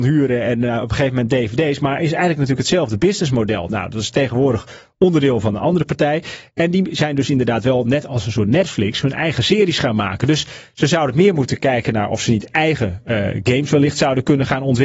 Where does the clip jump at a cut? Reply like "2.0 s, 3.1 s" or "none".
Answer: none